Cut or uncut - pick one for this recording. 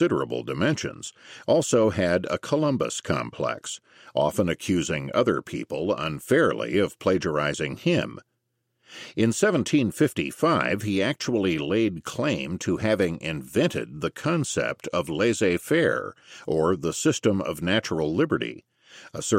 uncut